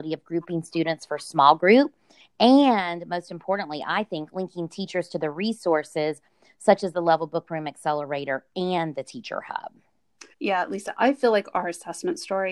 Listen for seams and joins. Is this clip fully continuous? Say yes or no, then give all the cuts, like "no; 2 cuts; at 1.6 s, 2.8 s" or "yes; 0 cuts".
no; 2 cuts; at 2.2 s, 10.3 s